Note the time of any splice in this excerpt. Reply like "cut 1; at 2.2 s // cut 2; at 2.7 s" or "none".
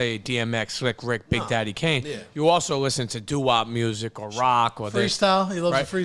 none